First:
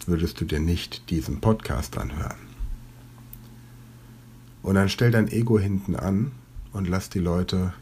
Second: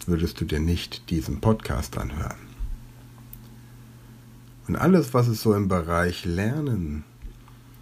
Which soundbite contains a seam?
first; 1 cut; at 4.6 s

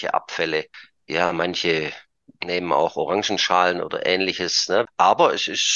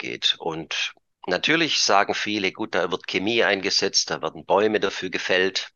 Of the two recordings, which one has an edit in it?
first; 1 cut; at 4.9 s

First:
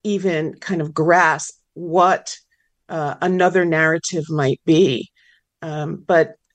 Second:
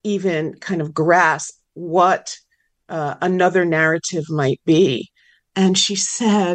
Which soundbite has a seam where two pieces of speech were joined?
second; 1 cut; at 5.5 s

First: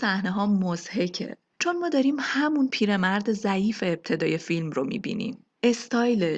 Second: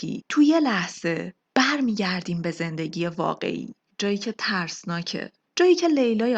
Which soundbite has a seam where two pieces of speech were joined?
second; 1 cut; at 3.9 s

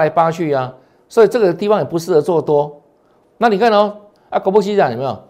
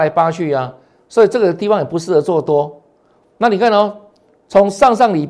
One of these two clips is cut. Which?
first; 1 cut; at 4.2 s

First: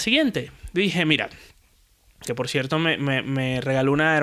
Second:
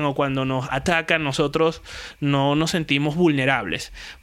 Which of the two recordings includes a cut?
first; 1 cut; at 2.2 s

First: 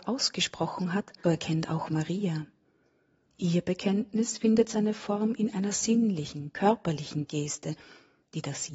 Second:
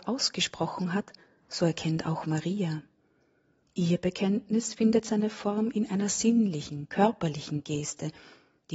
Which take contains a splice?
first; 1 cut; at 1.2 s

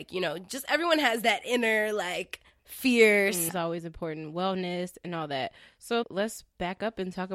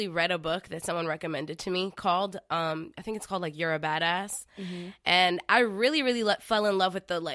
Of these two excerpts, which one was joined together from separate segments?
first; 2 cuts; at 3.5 s, 6.0 s

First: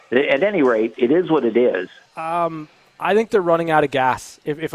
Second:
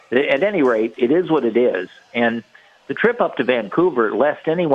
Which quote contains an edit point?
first; 1 cut; at 2.1 s

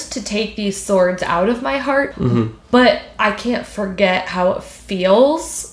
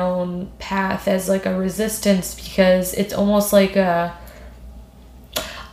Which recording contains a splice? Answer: first; 1 cut; at 2.1 s

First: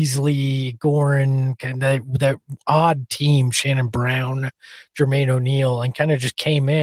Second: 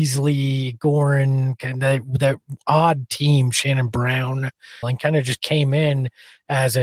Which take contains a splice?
second; 1 cut; at 4.8 s

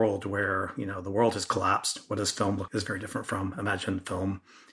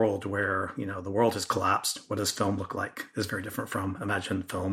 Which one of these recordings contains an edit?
first; 1 cut; at 2.7 s

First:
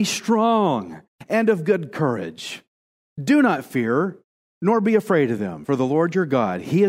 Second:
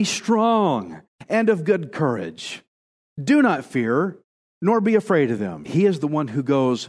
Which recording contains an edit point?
second; 1 cut; at 5.6 s

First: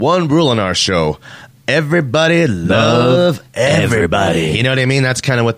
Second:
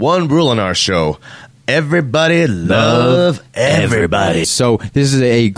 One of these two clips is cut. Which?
second; 1 cut; at 4.4 s

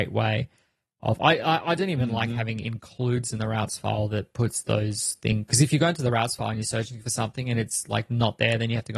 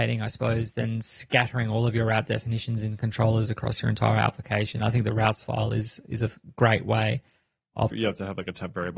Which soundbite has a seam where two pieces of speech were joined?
second; 1 cut; at 7.9 s

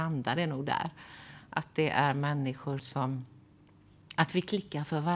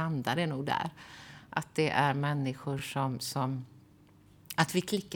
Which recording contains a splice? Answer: first; 1 cut; at 2.8 s

